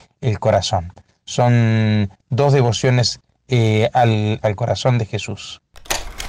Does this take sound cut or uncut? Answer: cut